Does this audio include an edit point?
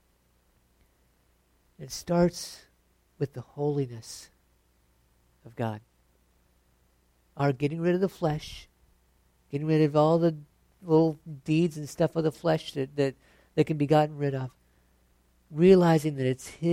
no; 0 cuts

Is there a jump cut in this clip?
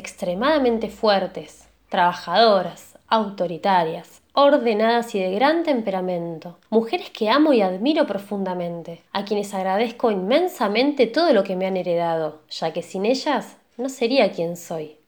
yes; 2 cuts; at 6.7 s, 9.1 s

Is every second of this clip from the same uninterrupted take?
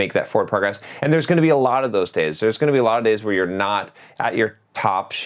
yes; 0 cuts

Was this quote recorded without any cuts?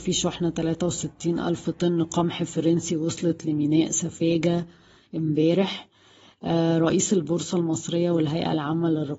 yes; 0 cuts

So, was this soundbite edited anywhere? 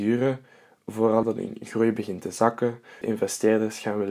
yes; 2 cuts; at 1.2 s, 3.0 s

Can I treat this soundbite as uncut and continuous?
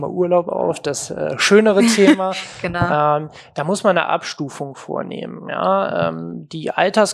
yes; 0 cuts

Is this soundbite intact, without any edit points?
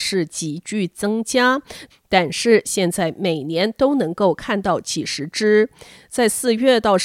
no; 1 cut; at 1.9 s

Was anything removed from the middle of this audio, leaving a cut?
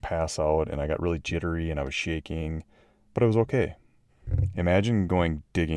yes; 1 cut; at 4.1 s

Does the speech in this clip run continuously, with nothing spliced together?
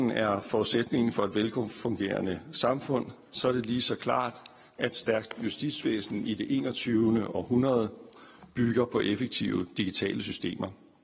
yes; 0 cuts

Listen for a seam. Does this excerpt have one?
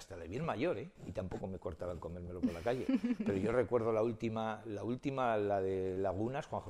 yes; 1 cut; at 1.0 s

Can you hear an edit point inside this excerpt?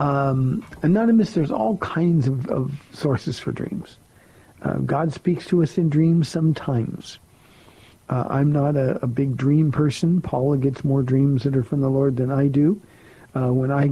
no; 0 cuts

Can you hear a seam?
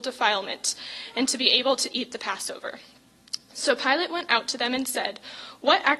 no; 0 cuts

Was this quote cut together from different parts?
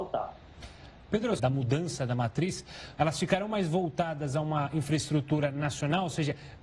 yes; 2 cuts; at 1.4 s, 3.0 s

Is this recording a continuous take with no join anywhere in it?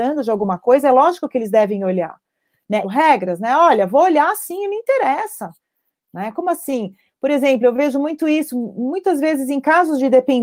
no; 1 cut; at 2.8 s

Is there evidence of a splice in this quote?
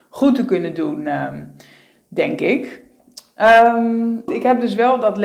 yes; 1 cut; at 4.3 s

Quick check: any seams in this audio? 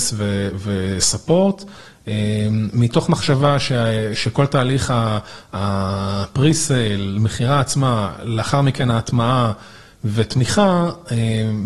no; 0 cuts

